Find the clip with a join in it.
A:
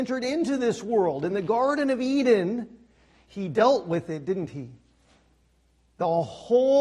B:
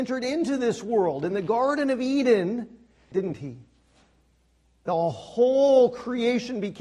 B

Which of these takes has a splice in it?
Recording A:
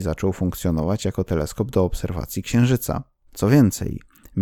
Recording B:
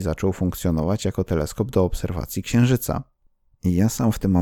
A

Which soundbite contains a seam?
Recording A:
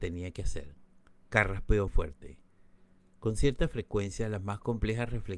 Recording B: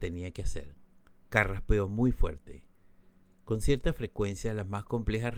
A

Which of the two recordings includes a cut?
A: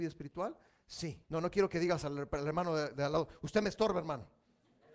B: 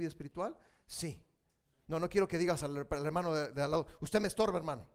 A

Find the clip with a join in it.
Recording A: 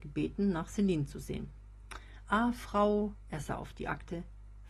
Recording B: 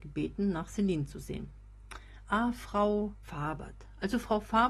B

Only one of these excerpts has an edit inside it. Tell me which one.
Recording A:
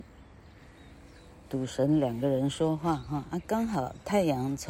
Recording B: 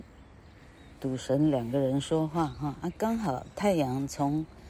B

